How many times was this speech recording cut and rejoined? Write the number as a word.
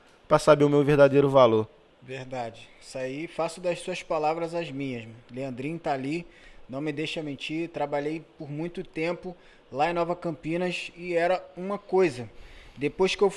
zero